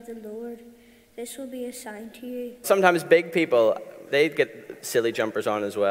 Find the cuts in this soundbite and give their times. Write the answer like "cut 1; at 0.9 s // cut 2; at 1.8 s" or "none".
cut 1; at 2.6 s // cut 2; at 4.1 s